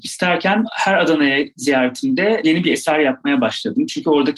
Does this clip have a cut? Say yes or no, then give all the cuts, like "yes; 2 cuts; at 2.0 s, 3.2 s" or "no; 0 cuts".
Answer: no; 0 cuts